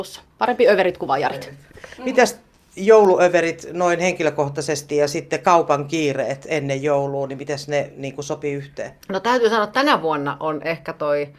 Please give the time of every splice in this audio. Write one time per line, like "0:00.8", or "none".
0:09.0